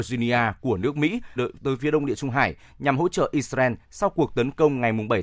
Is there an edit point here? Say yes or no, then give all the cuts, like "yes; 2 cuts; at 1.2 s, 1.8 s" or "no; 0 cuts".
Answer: yes; 1 cut; at 1.4 s